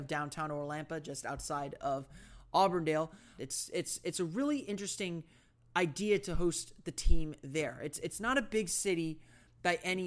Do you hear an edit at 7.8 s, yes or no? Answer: no